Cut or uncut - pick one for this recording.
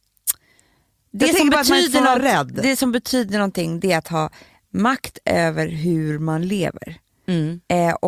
uncut